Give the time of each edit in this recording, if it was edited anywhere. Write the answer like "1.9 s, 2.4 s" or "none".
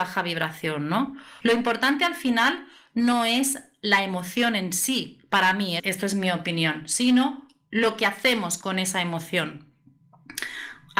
1.4 s, 5.8 s